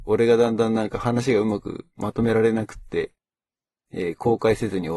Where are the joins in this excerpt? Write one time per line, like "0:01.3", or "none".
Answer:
none

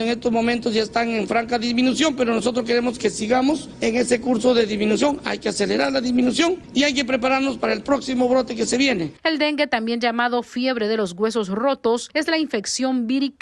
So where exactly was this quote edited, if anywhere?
none

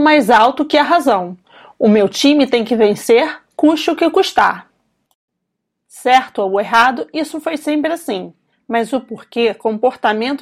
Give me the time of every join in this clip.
0:08.5

